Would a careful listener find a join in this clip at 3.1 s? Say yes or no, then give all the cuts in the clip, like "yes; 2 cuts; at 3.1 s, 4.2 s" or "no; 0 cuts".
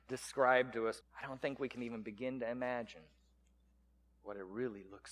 no; 1 cut; at 1.0 s